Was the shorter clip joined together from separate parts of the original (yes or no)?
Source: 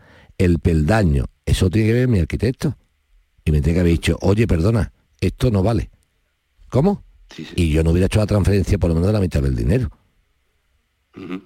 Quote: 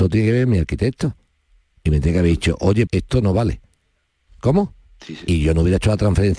yes